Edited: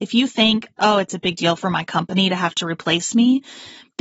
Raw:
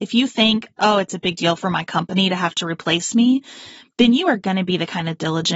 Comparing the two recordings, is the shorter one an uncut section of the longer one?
yes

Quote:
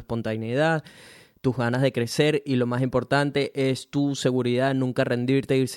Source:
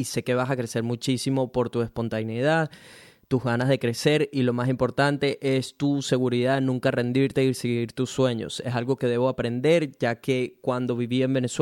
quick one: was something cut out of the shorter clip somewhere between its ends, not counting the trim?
no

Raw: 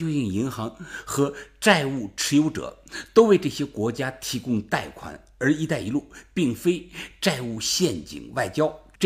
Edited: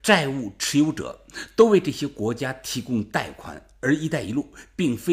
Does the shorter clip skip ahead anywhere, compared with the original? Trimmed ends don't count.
no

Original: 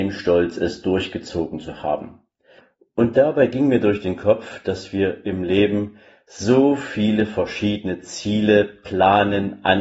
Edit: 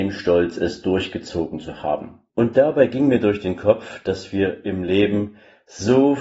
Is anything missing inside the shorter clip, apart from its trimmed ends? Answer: yes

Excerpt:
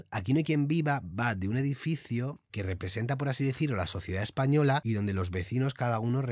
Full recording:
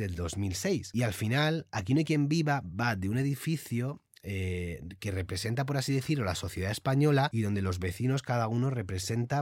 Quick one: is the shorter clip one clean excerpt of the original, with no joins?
no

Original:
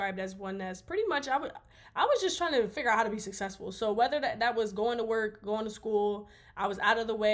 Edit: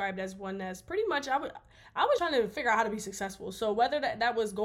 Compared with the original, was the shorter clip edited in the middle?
yes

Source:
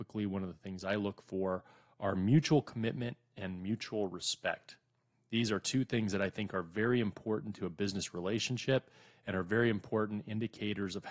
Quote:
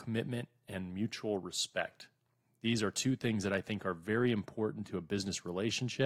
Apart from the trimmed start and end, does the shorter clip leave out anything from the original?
no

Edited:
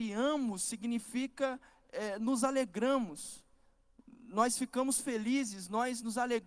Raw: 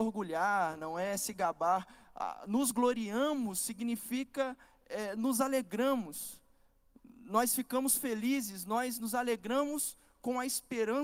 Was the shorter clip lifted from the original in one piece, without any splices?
yes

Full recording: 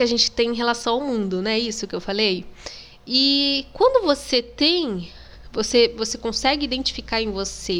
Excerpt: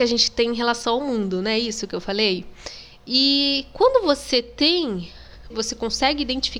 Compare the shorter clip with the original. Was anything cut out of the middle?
yes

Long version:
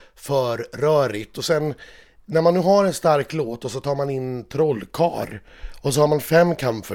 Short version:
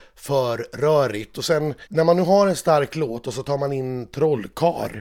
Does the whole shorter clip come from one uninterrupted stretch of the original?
no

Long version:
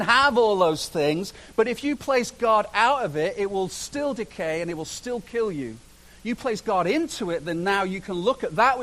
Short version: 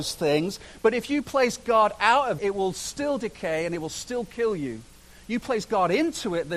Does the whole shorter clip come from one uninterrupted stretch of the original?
no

